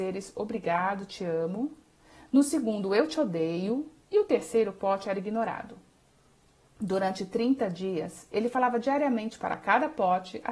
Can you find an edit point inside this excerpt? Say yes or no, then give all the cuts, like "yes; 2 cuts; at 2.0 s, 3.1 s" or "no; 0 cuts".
no; 0 cuts